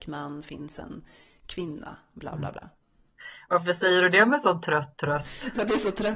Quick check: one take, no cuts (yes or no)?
yes